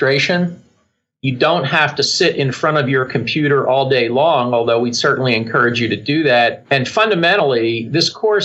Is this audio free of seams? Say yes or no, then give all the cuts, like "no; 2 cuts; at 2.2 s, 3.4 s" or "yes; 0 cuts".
no; 1 cut; at 6.6 s